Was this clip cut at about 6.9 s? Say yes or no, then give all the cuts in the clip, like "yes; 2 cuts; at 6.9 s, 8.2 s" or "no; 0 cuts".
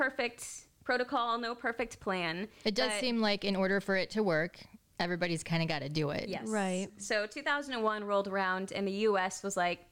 no; 0 cuts